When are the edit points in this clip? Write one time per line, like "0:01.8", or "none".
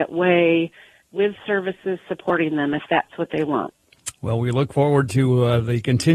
none